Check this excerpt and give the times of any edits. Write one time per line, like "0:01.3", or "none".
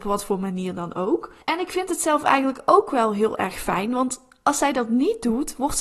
0:01.4